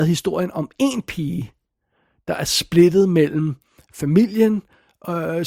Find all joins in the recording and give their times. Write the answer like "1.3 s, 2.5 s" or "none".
none